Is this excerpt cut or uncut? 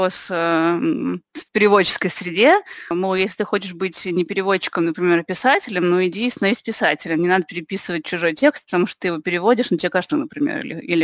cut